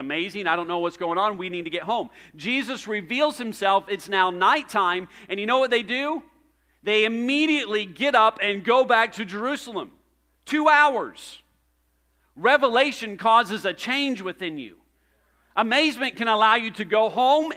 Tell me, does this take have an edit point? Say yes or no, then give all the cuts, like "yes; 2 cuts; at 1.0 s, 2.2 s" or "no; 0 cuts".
no; 0 cuts